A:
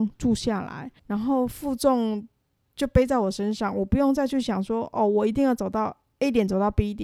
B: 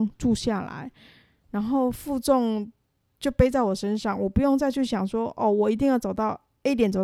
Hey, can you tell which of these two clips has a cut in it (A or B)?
A